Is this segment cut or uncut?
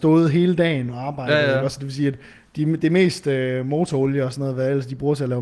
uncut